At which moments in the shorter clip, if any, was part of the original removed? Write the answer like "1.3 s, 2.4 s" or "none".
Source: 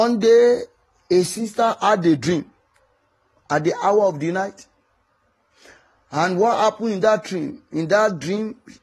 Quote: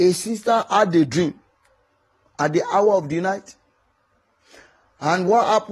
none

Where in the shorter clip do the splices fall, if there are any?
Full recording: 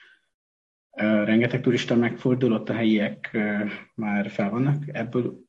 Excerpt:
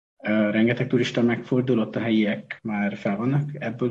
2.6 s

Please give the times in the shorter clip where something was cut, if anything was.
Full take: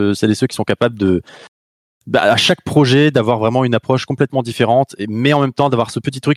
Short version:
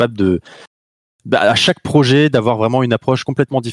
none

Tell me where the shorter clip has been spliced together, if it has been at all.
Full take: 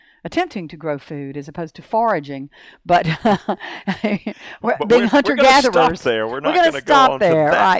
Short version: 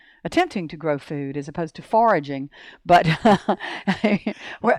none

